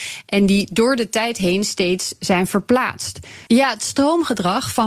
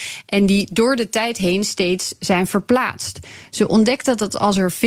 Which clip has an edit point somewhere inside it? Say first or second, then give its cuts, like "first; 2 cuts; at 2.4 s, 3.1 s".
first; 1 cut; at 3.5 s